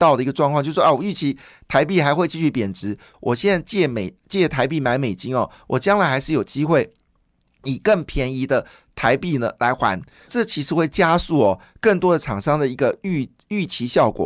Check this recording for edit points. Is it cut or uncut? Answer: cut